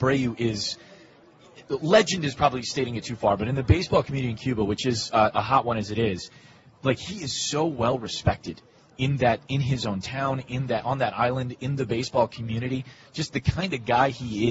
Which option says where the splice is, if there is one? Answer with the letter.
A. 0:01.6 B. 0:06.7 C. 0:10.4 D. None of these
D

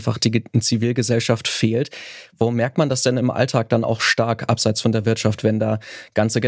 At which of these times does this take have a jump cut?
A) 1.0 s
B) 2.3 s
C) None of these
C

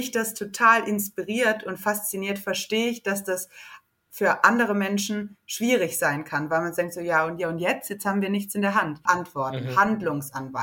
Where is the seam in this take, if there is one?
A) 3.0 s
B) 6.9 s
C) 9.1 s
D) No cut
C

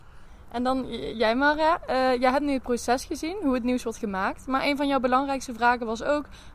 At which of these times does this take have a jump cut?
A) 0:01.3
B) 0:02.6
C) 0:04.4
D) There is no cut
D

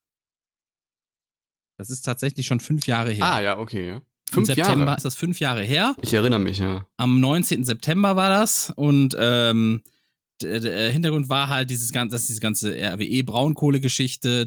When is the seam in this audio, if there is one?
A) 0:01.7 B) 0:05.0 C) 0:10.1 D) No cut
B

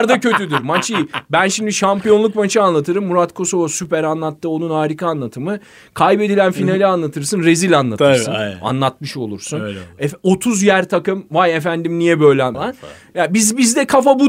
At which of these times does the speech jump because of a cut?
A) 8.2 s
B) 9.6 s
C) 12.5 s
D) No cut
C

